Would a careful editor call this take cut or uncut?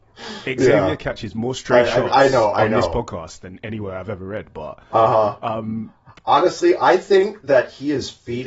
uncut